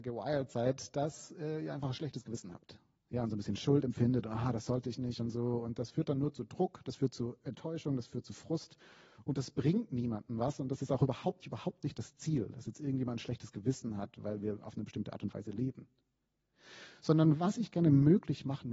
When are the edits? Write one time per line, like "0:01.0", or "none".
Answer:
0:11.4